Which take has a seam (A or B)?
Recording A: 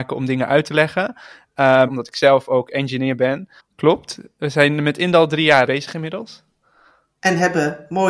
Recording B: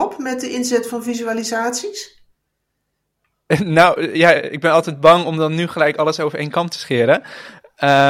A